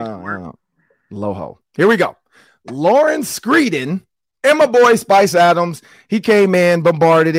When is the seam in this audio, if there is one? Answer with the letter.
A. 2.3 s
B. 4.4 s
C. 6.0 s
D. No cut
B